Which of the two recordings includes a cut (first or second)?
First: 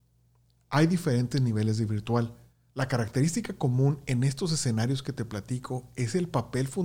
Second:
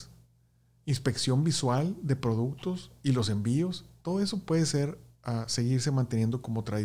first